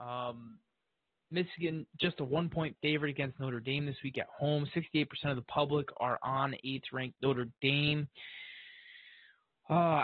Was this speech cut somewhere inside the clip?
no; 0 cuts

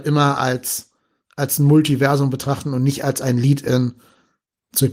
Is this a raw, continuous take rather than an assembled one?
yes; 0 cuts

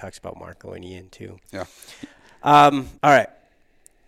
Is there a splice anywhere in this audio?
yes; 1 cut; at 3.0 s

